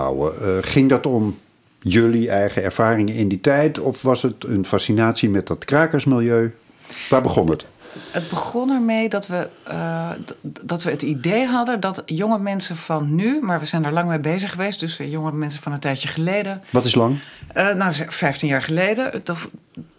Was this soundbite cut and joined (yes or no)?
no